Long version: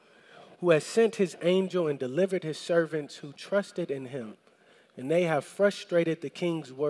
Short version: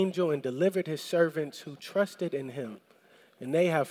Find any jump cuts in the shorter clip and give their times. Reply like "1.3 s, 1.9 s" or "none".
none